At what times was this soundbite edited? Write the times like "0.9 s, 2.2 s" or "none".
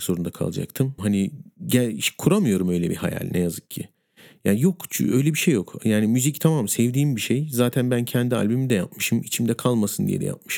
1.0 s